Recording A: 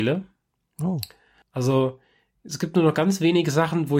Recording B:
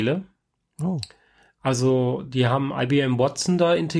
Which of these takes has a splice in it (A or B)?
A